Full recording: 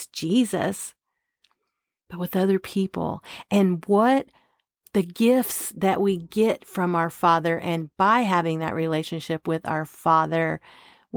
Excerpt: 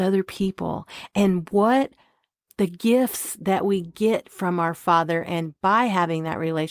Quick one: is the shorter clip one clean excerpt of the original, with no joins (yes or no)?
yes